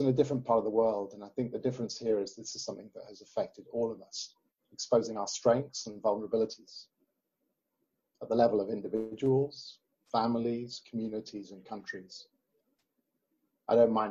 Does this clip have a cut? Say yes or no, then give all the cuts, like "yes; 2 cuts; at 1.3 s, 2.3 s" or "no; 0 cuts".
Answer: no; 0 cuts